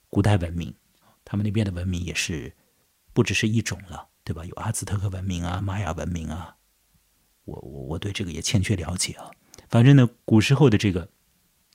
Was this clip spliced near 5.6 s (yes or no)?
no